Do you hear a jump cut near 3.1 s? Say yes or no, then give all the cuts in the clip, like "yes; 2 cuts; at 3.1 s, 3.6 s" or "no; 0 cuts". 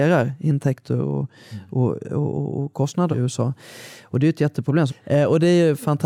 yes; 2 cuts; at 3.1 s, 4.9 s